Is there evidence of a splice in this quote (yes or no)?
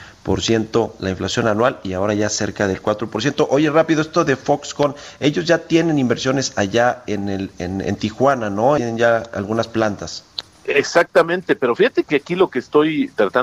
yes